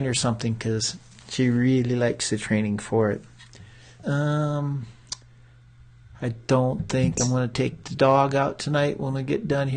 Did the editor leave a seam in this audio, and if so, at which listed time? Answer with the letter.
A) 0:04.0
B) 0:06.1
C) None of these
A